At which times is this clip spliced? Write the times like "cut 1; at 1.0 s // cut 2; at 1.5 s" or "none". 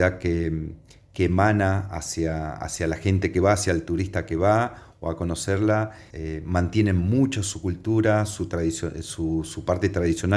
cut 1; at 6.1 s